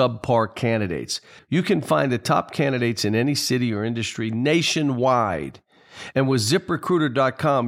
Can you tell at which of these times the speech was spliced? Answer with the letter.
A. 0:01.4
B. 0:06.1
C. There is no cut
A